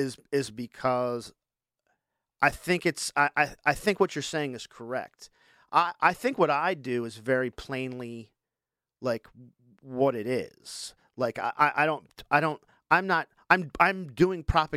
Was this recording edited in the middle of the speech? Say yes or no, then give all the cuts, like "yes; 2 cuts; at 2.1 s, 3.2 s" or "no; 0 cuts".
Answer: no; 0 cuts